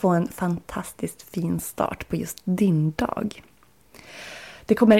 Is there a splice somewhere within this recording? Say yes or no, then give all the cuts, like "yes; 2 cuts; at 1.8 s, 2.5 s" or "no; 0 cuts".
no; 0 cuts